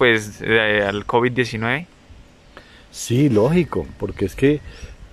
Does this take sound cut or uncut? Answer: uncut